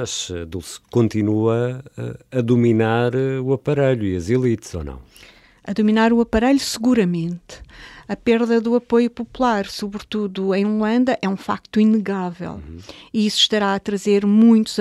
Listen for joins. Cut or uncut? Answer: uncut